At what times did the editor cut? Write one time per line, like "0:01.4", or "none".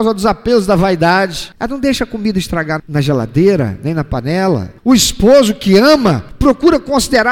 0:02.8